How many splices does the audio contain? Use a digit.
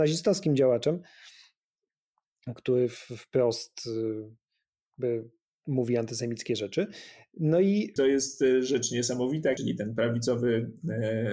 2